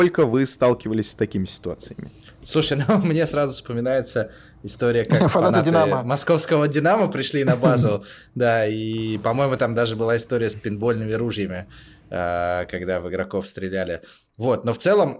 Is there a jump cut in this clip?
no; 0 cuts

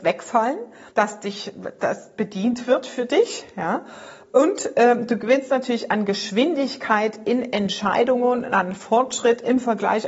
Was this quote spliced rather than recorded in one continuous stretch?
yes; 1 cut; at 0.9 s

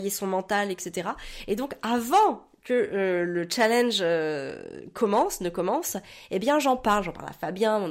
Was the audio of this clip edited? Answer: no; 0 cuts

